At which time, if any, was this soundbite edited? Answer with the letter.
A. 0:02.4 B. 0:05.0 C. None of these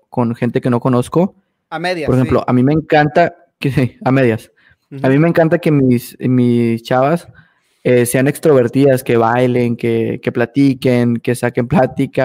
C